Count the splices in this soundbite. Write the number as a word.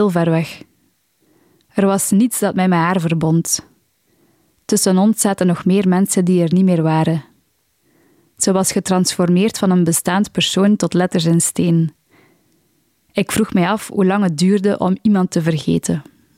zero